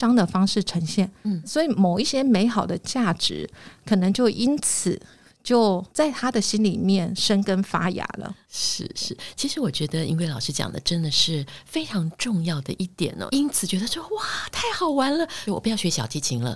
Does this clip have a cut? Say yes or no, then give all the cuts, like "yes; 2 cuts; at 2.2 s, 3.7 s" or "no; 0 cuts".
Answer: yes; 2 cuts; at 13.3 s, 15.5 s